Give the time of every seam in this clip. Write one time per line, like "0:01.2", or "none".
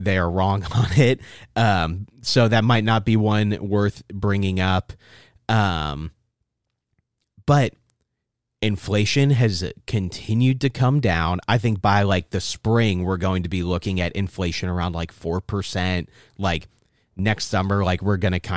none